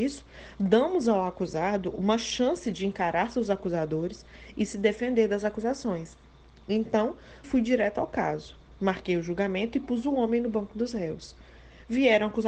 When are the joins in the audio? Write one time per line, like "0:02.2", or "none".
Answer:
0:07.4